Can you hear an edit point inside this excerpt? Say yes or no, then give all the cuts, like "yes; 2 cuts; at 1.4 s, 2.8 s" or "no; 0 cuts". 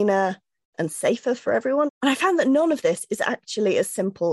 yes; 1 cut; at 1.9 s